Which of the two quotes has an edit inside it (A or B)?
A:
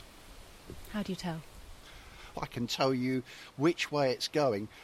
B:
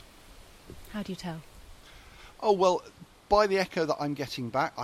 A